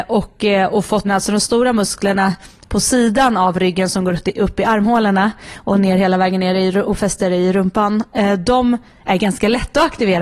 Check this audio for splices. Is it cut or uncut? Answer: cut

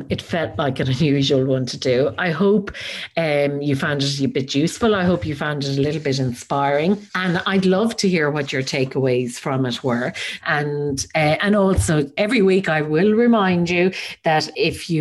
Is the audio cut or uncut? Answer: cut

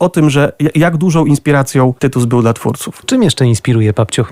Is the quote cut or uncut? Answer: cut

